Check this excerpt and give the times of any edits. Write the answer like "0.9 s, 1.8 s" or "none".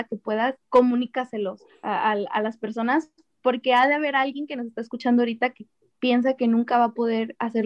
none

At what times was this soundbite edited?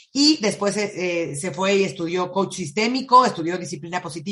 none

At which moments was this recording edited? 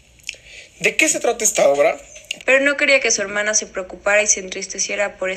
2.4 s

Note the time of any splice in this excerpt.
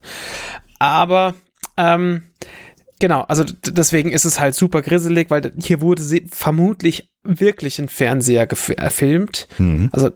3.0 s

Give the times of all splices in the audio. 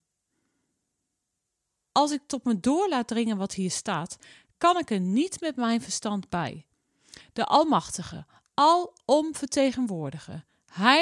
1.9 s

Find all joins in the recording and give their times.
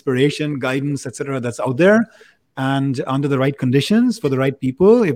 none

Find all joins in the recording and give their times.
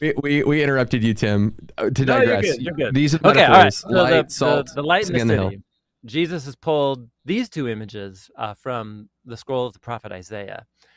none

